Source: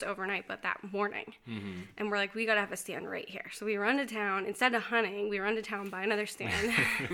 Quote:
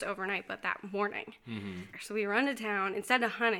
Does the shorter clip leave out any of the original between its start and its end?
yes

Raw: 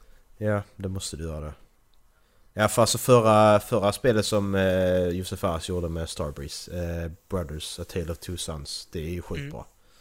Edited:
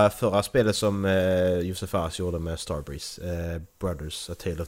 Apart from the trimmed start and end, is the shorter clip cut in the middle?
no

